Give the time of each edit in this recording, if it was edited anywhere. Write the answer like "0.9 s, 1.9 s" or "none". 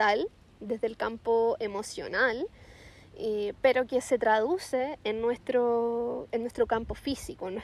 none